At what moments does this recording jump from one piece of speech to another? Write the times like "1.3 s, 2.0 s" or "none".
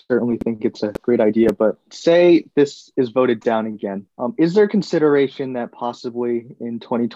4.1 s